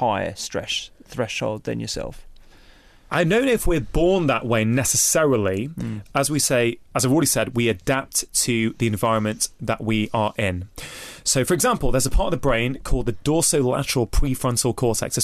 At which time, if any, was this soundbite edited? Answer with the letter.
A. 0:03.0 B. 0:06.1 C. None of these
B